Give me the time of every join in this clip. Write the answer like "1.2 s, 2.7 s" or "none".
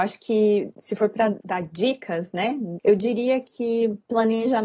2.8 s

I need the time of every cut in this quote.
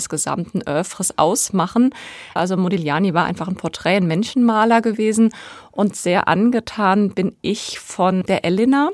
2.4 s

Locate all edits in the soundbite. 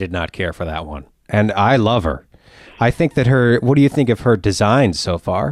1.3 s

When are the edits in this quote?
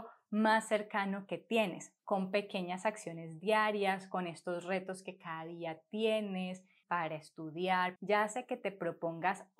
2.0 s, 6.8 s, 8.0 s

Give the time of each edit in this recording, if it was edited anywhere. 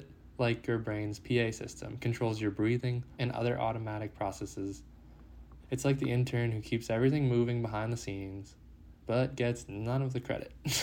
3.2 s, 5.6 s

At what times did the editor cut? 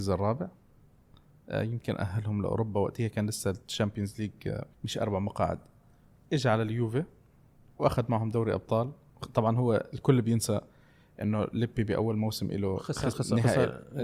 4.7 s, 13.1 s

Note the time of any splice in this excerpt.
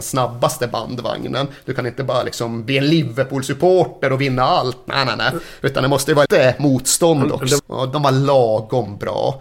6.3 s, 7.6 s

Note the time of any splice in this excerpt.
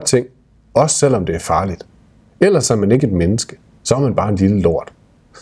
none

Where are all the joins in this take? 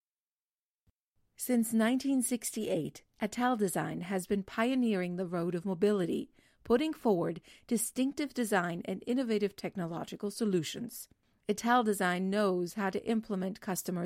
none

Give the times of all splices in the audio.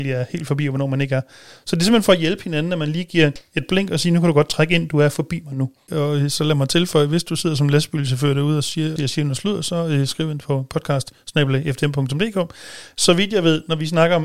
5.9 s, 9.0 s

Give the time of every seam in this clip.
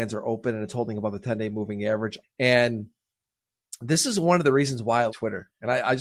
2.2 s, 5.1 s

